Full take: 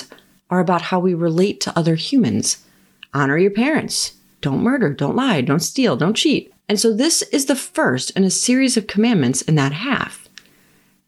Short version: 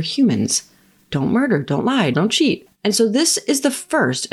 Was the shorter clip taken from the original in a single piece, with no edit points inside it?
no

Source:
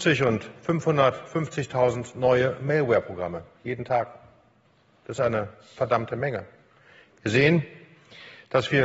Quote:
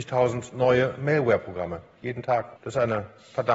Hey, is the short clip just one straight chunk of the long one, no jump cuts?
no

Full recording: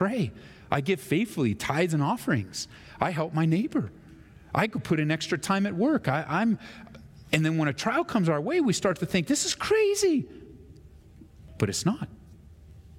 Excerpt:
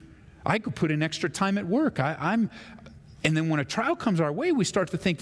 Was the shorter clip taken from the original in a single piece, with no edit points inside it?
yes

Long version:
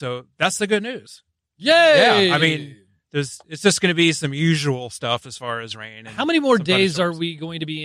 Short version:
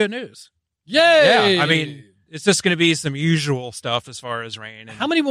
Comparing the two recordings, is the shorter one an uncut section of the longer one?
no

